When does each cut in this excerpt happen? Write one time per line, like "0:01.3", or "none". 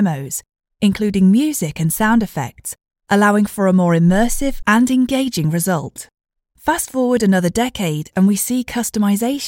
0:06.5